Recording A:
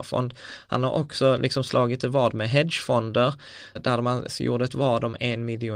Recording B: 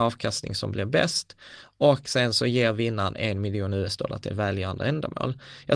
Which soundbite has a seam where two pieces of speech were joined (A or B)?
A